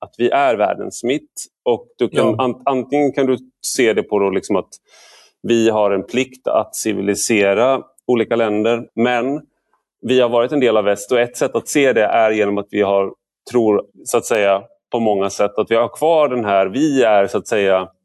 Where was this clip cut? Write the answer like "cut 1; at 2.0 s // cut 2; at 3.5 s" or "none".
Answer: cut 1; at 8.9 s // cut 2; at 13.9 s